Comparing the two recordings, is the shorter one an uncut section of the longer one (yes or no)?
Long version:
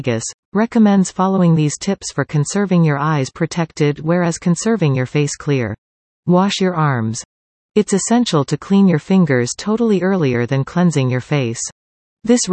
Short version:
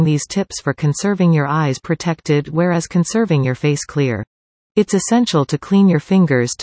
no